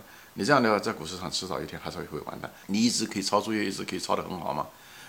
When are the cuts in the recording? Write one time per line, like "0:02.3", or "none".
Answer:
0:02.6